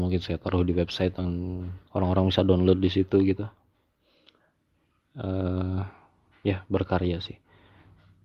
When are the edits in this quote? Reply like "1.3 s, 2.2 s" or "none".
1.9 s